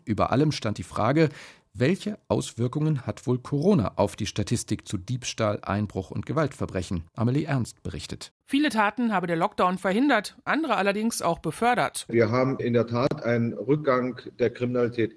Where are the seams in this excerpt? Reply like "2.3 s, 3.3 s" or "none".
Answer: 7.1 s, 8.4 s